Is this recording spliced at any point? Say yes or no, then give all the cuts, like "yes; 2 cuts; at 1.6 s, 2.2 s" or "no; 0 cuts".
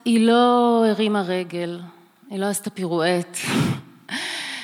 no; 0 cuts